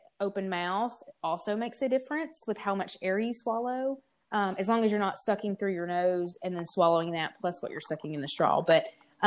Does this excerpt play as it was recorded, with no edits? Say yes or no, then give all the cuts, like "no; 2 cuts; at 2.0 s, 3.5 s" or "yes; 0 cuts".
yes; 0 cuts